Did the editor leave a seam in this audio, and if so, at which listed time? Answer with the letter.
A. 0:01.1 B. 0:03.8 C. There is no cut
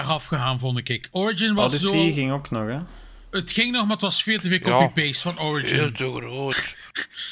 C